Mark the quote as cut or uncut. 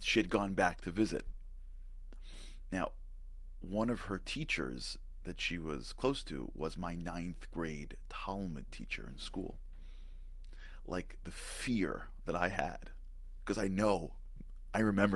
uncut